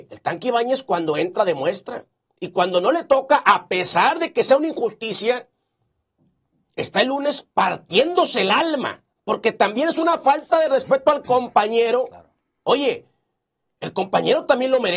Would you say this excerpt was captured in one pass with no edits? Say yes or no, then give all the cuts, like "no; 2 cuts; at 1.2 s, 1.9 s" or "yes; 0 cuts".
no; 1 cut; at 9.1 s